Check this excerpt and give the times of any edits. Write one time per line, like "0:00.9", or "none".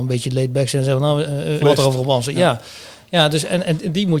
0:01.6